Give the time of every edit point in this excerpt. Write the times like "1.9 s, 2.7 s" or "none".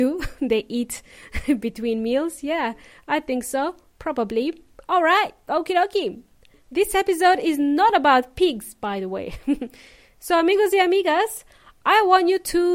none